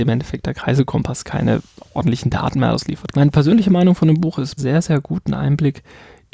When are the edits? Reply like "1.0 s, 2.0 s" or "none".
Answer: 3.1 s, 4.6 s